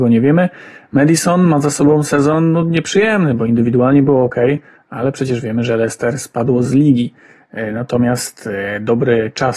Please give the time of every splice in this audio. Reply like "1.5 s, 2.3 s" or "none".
none